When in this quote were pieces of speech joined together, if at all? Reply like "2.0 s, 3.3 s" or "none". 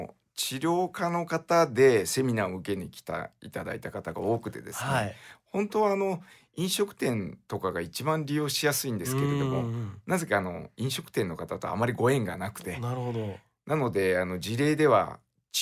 none